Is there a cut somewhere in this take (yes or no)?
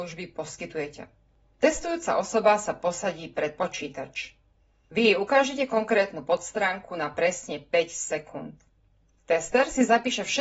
no